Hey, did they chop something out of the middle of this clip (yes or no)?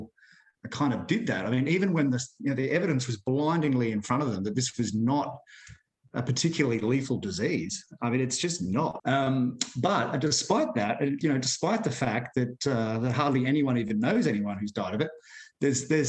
yes